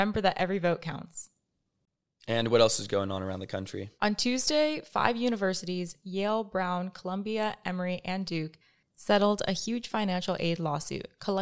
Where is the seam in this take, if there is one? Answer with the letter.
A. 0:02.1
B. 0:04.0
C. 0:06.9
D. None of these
B